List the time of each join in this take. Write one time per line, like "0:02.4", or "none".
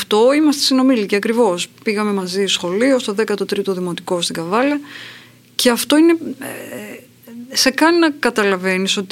none